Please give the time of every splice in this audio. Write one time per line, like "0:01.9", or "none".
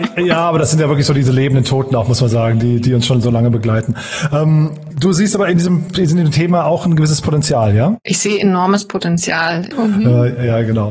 0:04.9
0:09.7